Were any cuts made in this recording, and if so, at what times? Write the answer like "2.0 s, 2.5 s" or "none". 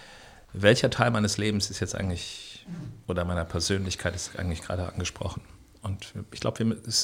none